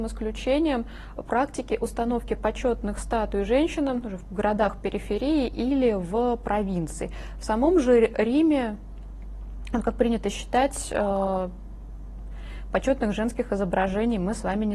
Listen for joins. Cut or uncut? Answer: uncut